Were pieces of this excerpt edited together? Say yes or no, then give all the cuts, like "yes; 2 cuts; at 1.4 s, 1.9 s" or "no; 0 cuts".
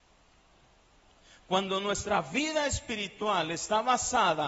no; 0 cuts